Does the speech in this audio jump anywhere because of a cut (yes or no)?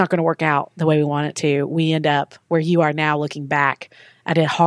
no